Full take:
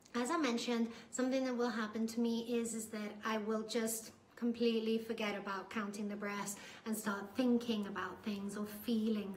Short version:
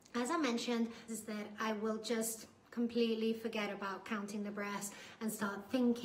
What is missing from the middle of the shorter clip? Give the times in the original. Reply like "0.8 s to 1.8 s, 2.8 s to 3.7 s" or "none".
1.1 s to 2.7 s